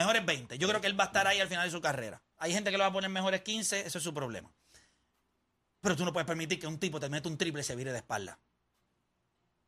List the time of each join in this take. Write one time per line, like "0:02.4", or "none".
0:02.3